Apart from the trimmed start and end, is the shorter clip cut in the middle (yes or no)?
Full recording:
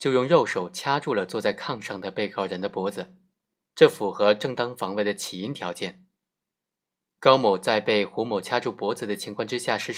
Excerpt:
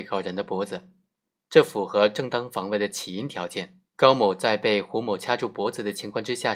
yes